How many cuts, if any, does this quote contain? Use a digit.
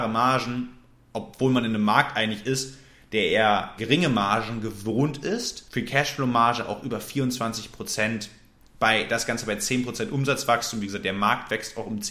1